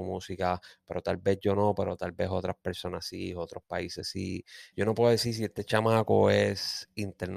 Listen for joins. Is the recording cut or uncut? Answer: cut